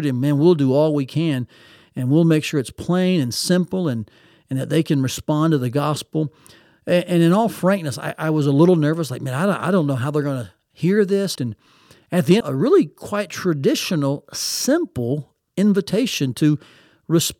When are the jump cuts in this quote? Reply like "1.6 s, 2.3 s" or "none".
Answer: 11.4 s, 12.4 s